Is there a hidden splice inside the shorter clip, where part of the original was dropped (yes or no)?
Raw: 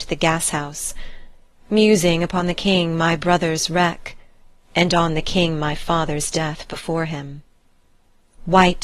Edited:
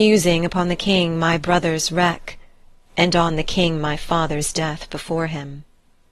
no